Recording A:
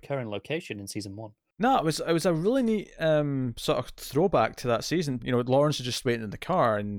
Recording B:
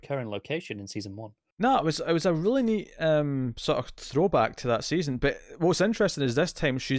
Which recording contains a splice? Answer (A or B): A